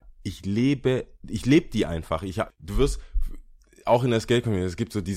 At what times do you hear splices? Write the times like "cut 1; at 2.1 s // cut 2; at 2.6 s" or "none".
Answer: cut 1; at 1.2 s // cut 2; at 2.5 s